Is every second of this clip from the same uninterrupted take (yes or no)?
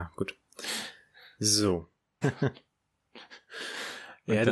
no